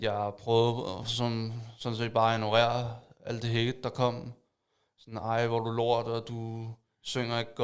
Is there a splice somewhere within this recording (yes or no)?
no